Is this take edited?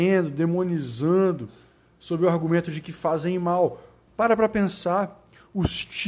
yes; 1 cut; at 4.1 s

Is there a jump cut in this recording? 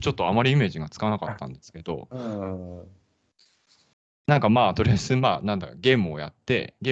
no; 0 cuts

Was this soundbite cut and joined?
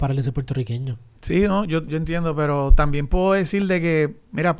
yes; 1 cut; at 1.9 s

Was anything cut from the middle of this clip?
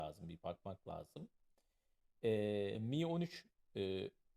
no; 0 cuts

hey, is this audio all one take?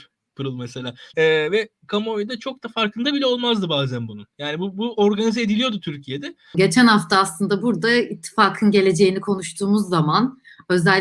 no; 2 cuts; at 1.1 s, 6.5 s

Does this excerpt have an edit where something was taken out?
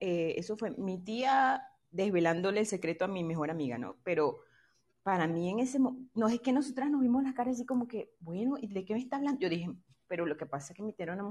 no; 0 cuts

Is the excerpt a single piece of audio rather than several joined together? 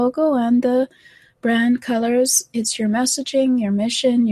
no; 1 cut; at 2.5 s

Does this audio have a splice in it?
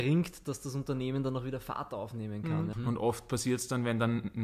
yes; 1 cut; at 2.7 s

